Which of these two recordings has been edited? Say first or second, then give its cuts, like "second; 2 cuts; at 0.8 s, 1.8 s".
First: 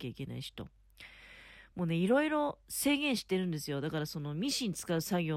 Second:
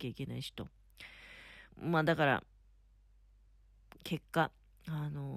second; 2 cuts; at 1.7 s, 4.0 s